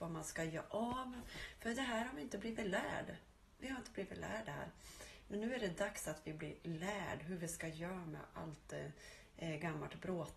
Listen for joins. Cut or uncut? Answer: uncut